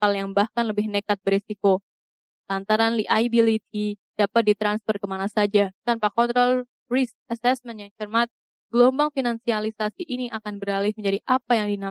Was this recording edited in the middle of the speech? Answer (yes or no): yes